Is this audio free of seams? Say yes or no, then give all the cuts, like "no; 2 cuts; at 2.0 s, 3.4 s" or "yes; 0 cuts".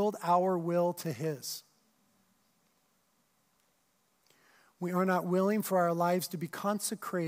yes; 0 cuts